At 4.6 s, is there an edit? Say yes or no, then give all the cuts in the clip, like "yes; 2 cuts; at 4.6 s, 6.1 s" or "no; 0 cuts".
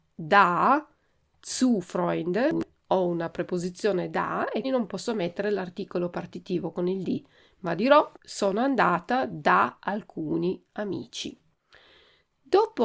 yes; 2 cuts; at 4.6 s, 8.2 s